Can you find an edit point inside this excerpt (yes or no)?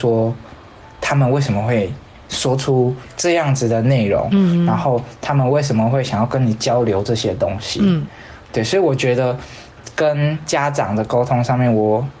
no